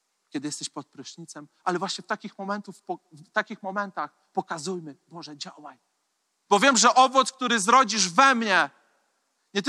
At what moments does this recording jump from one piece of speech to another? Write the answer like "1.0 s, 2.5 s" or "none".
6.5 s